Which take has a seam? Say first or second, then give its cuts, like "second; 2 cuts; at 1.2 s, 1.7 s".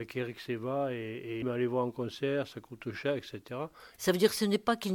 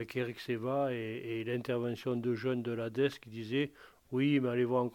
first; 2 cuts; at 1.4 s, 4.0 s